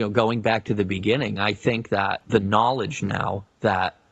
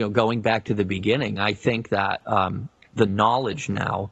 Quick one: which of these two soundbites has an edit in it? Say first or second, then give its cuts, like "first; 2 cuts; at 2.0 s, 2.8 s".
first; 1 cut; at 2.2 s